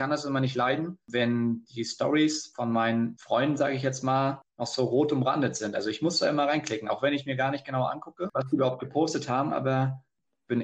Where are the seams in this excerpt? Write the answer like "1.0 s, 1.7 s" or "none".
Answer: none